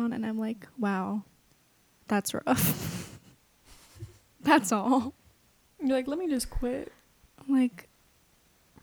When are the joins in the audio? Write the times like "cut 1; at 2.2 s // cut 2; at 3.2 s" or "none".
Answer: none